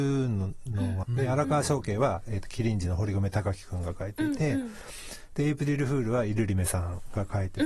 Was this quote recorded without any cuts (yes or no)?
no